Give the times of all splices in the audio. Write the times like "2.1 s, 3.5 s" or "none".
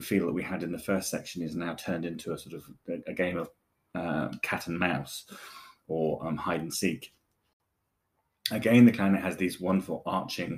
none

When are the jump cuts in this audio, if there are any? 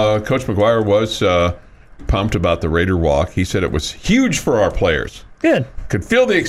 2.0 s

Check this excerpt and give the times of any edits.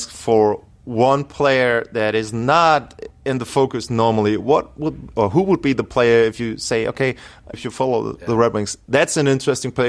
7.5 s

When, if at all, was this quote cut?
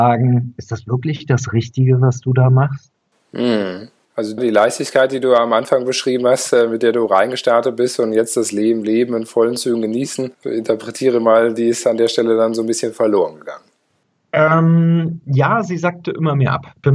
none

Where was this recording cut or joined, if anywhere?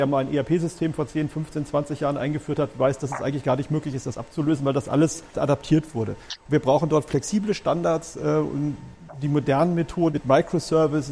5.3 s, 10.1 s

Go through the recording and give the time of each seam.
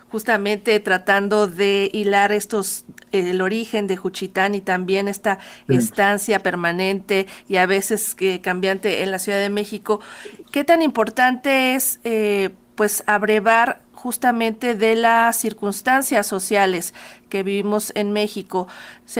none

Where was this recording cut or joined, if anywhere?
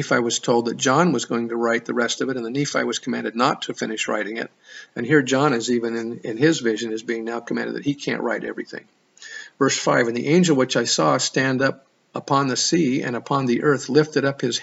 none

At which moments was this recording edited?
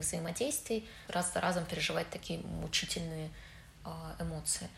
1.1 s

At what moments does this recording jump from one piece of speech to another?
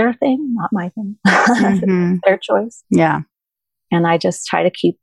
2.8 s

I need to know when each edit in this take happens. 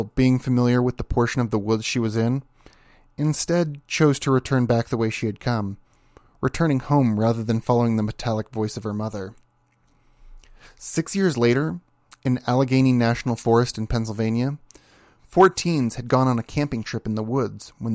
none

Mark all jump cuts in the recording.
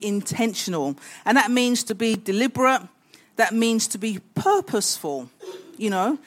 none

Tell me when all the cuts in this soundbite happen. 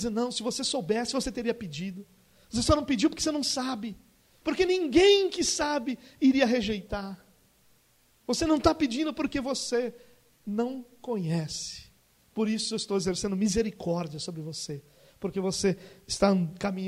4.4 s

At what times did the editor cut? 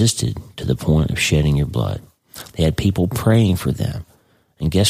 2.5 s

